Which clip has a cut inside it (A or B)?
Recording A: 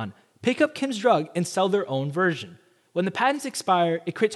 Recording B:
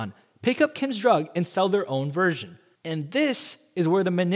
B